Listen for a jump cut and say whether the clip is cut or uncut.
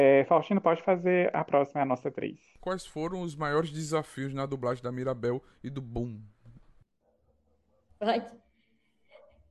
cut